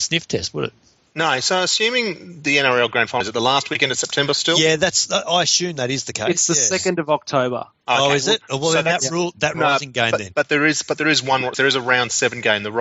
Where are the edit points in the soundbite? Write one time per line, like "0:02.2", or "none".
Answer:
0:03.2
0:09.5
0:11.5

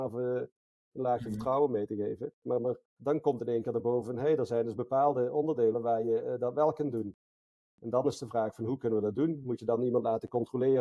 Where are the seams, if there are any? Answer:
0:02.8

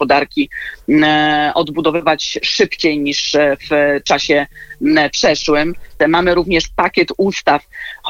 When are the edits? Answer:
0:06.0

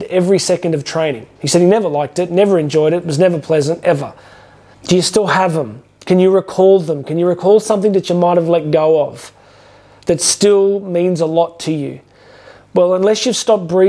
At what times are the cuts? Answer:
0:04.7

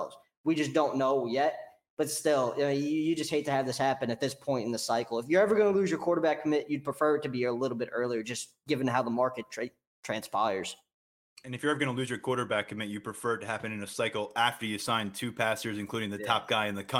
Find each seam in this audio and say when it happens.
none

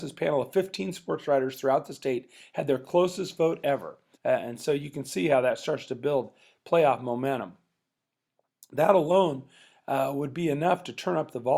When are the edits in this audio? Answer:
0:04.1

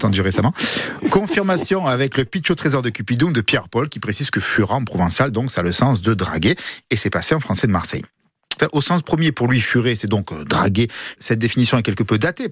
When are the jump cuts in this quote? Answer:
0:08.6
0:11.2

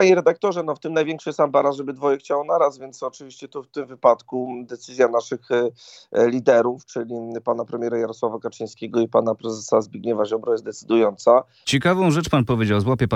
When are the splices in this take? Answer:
0:11.6

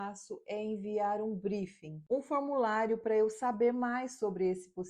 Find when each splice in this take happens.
none

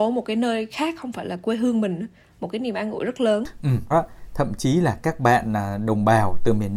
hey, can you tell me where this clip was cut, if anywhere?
0:03.9

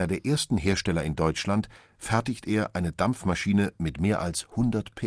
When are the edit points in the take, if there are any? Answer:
none

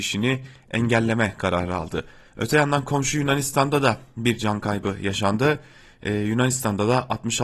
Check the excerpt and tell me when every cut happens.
none

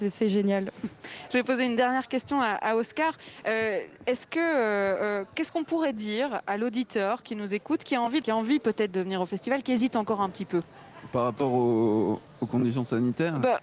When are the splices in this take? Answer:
0:08.2

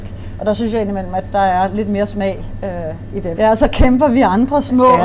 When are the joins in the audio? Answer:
0:03.4

